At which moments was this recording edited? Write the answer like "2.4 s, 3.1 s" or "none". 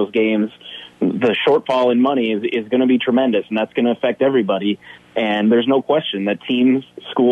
none

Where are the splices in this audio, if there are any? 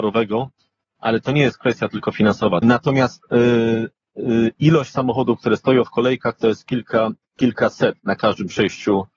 2.6 s

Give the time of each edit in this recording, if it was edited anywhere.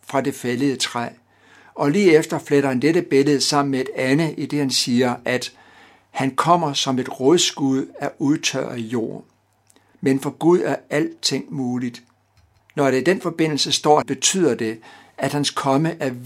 9.9 s, 12.6 s, 14.0 s

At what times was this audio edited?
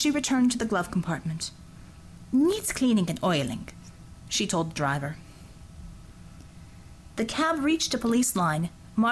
none

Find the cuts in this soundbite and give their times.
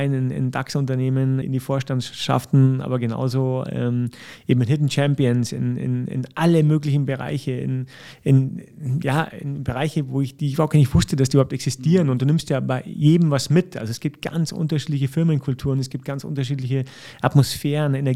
1.4 s

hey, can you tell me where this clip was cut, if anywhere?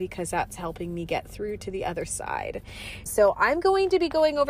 3.1 s

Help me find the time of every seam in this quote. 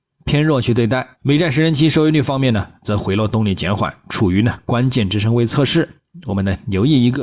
1.1 s

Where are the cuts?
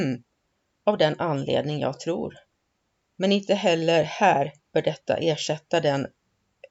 3.0 s, 4.6 s

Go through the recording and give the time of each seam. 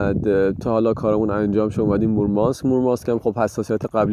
none

